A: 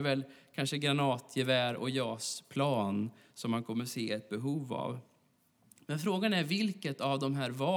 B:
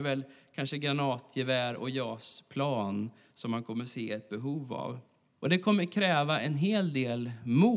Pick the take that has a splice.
B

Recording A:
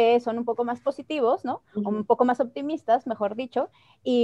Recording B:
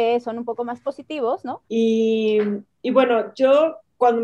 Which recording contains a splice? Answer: B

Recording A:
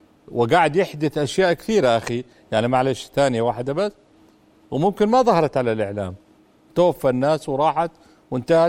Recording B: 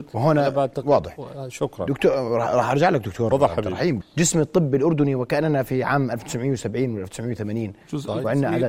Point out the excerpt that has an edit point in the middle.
B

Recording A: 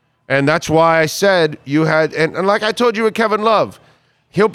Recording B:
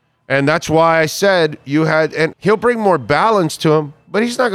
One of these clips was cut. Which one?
B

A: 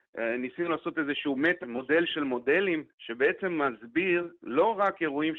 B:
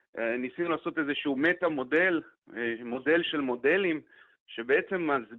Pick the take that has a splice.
A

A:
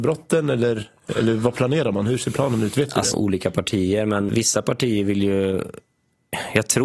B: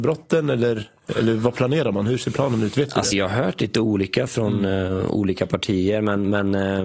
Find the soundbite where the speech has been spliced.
A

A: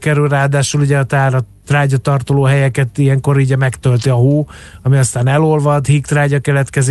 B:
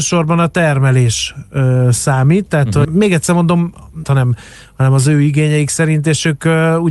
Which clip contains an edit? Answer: B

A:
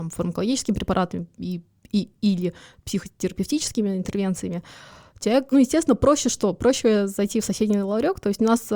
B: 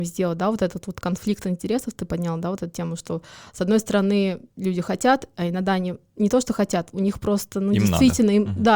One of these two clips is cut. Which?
A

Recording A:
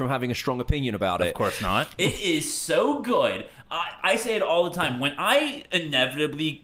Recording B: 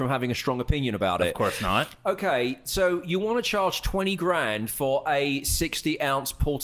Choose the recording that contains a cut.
A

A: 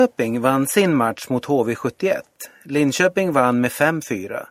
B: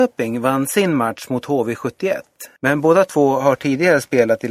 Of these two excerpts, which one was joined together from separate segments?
B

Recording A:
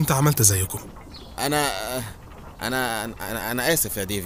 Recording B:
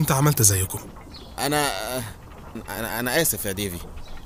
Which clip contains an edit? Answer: B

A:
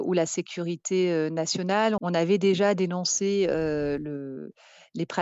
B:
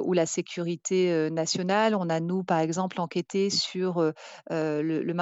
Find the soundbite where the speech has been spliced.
A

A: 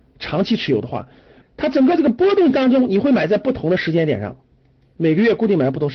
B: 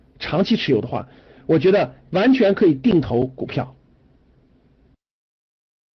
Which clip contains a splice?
A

